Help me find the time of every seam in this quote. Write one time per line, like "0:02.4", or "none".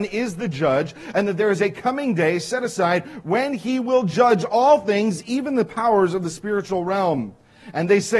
none